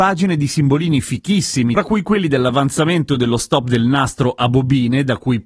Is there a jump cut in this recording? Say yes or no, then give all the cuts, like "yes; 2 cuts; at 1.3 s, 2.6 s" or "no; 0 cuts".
yes; 1 cut; at 1.7 s